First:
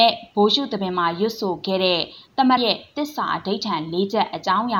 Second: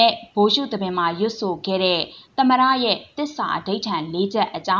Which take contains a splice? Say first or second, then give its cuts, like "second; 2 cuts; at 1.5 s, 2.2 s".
first; 1 cut; at 2.6 s